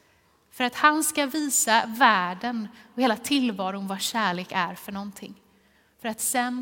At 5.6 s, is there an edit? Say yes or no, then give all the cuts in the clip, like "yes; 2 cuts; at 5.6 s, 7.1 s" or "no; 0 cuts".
no; 0 cuts